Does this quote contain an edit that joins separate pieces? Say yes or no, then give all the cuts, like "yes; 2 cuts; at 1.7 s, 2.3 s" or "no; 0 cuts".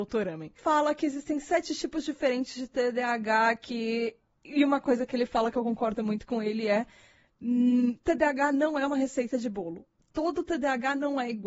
no; 0 cuts